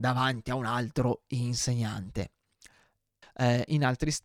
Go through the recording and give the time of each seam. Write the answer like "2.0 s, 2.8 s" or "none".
3.2 s

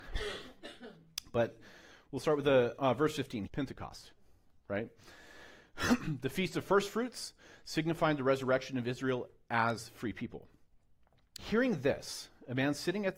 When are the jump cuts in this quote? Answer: 3.5 s, 11.4 s

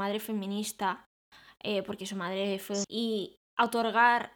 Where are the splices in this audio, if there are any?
2.8 s

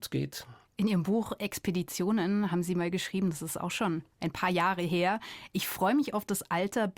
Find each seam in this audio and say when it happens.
none

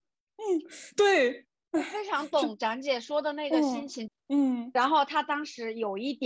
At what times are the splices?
1.7 s, 4.1 s

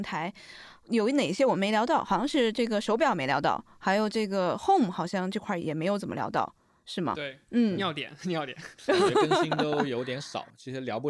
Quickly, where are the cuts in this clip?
5.6 s

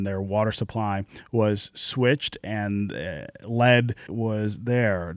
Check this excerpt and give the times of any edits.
4.1 s

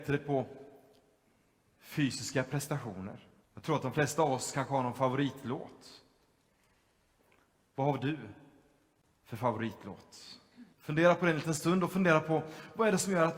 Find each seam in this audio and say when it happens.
3.4 s, 10.7 s

